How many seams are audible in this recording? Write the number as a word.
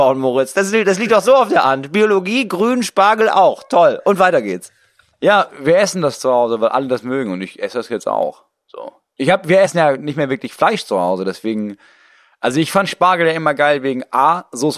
zero